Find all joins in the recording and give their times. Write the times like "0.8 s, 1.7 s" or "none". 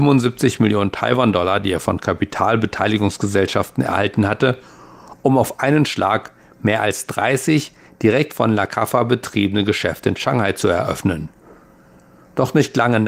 none